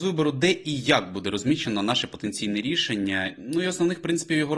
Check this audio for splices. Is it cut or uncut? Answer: uncut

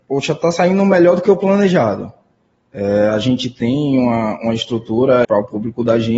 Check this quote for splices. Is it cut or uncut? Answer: cut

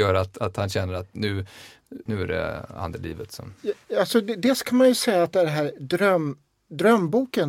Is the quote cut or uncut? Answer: cut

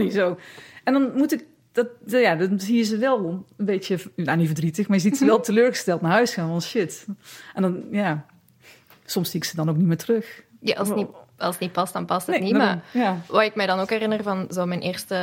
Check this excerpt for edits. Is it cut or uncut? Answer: uncut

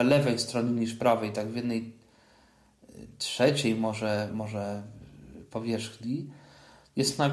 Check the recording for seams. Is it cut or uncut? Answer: cut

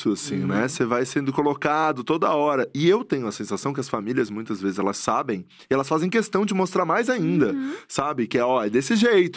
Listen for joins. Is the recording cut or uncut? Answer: uncut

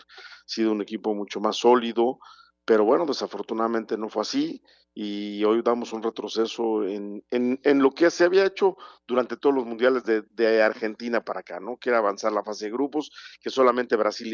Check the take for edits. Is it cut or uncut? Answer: uncut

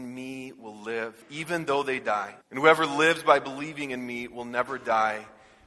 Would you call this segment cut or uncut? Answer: cut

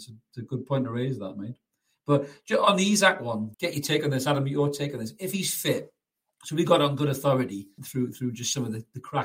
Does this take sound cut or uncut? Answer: cut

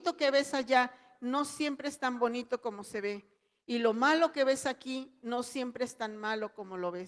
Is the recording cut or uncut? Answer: uncut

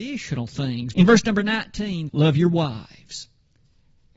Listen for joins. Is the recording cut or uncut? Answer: cut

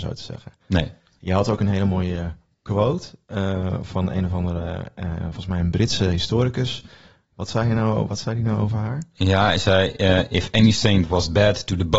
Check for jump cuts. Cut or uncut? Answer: uncut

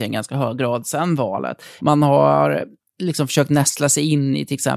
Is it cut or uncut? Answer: cut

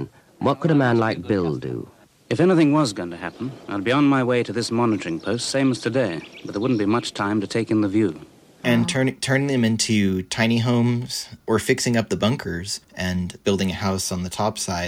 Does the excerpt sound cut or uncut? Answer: cut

